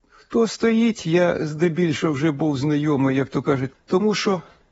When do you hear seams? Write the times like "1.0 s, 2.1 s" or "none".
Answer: 3.7 s